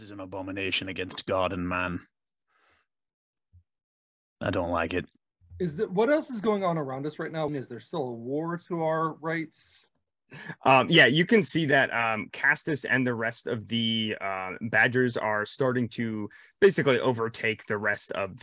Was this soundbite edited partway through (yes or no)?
yes